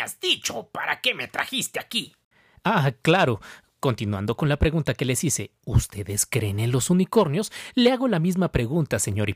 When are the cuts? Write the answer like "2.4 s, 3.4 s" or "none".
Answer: none